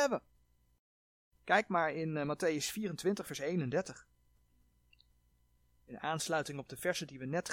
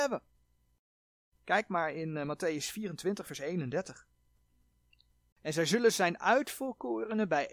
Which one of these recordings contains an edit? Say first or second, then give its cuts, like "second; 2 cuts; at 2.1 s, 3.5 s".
second; 1 cut; at 5.3 s